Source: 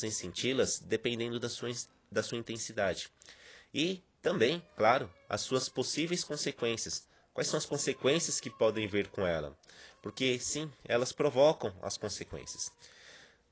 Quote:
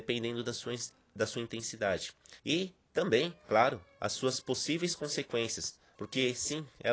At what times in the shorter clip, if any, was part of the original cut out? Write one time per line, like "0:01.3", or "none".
0:02.4
0:06.0